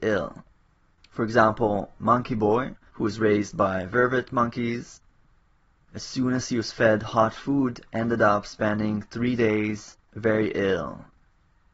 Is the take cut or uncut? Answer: uncut